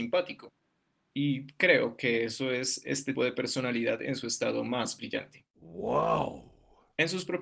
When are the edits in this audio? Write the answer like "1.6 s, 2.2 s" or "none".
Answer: 3.1 s